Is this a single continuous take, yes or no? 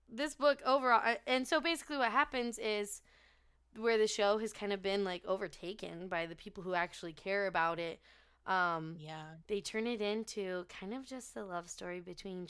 yes